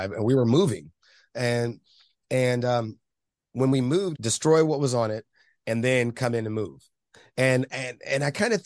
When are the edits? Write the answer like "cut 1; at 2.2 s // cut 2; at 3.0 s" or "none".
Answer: cut 1; at 4.1 s